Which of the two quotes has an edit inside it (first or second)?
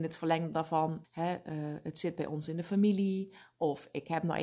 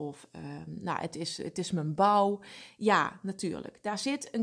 first